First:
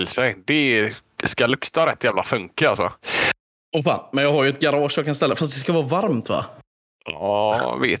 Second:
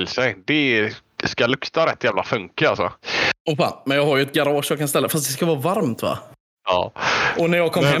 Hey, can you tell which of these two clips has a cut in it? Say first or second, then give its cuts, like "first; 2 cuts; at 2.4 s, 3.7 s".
second; 2 cuts; at 3.4 s, 6.6 s